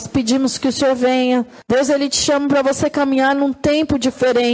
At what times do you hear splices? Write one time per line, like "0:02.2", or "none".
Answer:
0:01.6